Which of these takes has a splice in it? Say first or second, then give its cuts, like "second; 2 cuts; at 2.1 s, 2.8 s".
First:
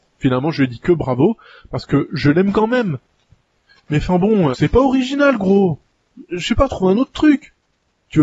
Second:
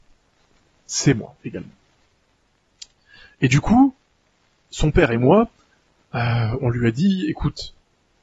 first; 1 cut; at 4.5 s